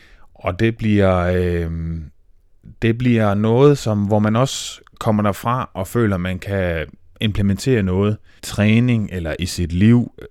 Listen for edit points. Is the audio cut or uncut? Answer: cut